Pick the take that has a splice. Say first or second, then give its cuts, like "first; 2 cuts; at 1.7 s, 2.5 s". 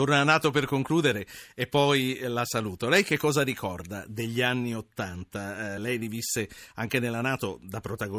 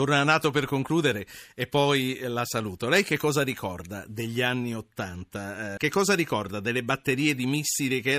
second; 1 cut; at 5.8 s